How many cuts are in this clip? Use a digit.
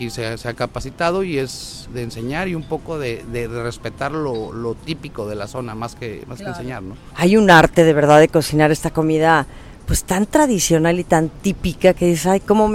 2